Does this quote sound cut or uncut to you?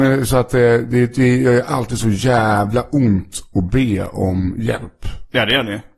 uncut